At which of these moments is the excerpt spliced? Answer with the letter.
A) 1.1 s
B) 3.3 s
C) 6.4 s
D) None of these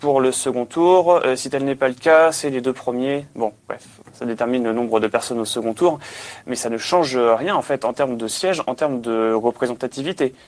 D